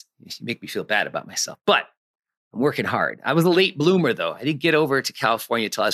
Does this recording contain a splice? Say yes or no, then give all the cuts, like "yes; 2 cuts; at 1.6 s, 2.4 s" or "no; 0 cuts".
no; 0 cuts